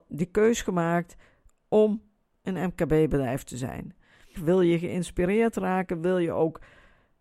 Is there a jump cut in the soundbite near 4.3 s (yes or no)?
yes